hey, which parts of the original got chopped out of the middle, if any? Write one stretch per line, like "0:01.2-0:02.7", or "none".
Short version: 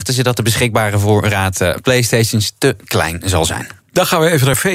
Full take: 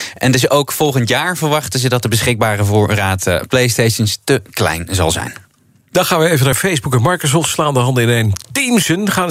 0:05.5-0:05.8